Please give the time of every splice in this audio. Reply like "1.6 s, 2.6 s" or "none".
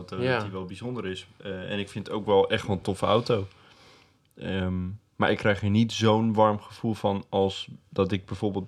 none